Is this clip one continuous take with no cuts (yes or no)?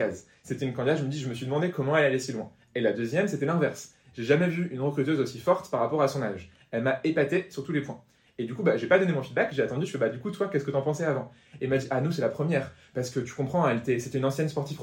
yes